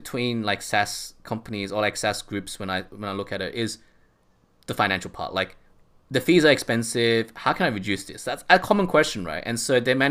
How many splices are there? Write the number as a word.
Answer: zero